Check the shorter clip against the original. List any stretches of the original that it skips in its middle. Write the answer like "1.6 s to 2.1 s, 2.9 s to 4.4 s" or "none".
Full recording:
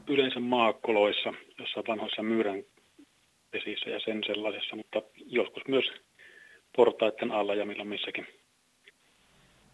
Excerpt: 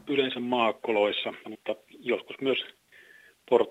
1.4 s to 4.7 s

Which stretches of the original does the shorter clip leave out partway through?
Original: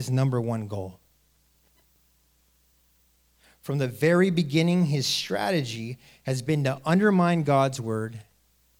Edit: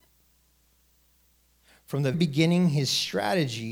3.9 s to 4.3 s

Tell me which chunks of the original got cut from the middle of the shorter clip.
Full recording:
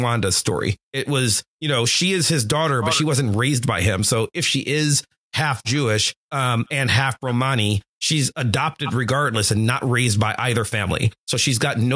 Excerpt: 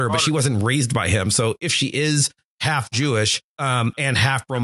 none

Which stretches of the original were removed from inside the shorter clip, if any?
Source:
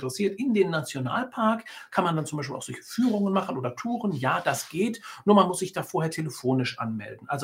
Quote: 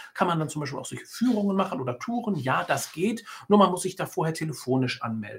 none

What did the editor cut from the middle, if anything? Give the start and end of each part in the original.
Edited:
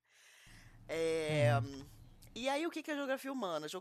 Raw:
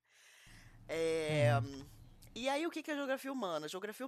none

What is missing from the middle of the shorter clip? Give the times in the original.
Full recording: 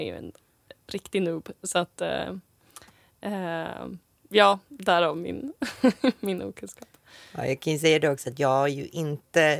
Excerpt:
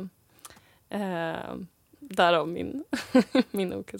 4.3 s to 4.6 s

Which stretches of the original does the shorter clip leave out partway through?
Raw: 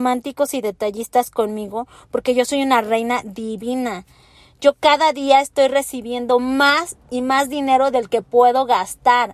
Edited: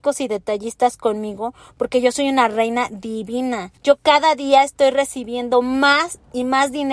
4.1 s to 4.5 s

